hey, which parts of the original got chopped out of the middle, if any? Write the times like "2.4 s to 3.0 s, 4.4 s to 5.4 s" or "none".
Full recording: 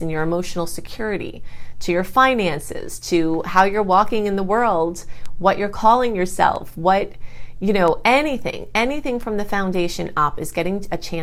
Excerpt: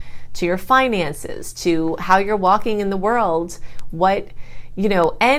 5.4 s to 6.7 s